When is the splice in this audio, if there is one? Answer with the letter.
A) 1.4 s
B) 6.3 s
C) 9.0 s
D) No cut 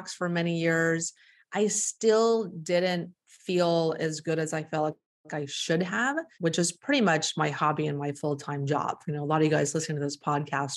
B